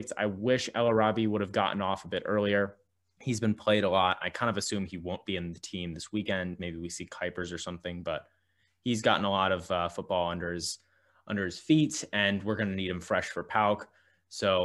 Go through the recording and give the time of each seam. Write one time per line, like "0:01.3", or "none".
none